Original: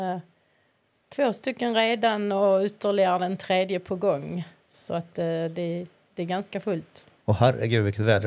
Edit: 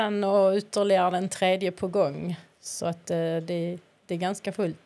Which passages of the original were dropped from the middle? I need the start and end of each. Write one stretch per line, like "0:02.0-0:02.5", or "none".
none